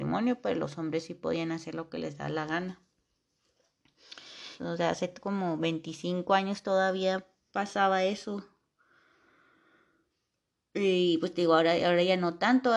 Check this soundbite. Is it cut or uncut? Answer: cut